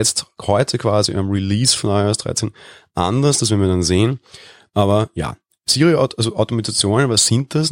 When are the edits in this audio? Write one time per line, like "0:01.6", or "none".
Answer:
none